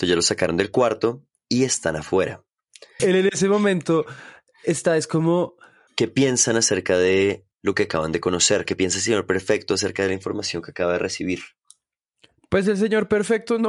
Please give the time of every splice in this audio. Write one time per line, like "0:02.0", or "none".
0:03.0
0:05.9